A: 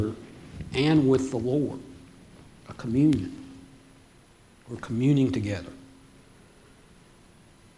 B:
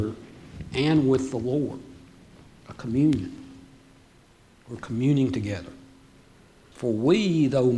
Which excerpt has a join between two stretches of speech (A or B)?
B